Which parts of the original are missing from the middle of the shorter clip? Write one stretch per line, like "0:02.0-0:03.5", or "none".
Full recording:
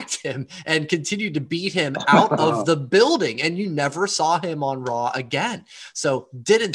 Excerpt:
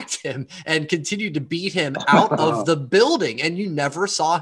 none